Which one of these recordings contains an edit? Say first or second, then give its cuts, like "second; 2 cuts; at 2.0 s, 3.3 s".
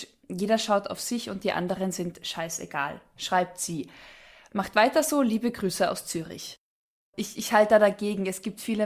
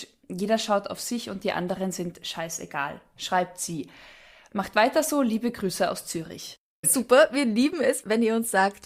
second; 1 cut; at 6.8 s